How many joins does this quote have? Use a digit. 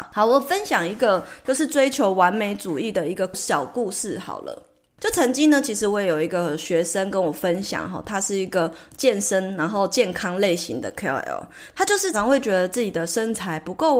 1